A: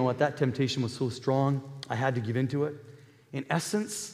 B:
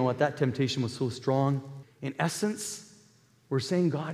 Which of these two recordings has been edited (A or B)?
B